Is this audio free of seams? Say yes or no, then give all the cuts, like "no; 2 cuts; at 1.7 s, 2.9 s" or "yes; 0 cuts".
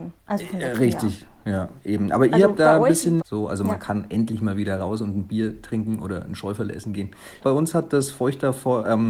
no; 2 cuts; at 3.2 s, 7.4 s